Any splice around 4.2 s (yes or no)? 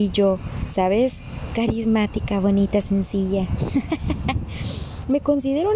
no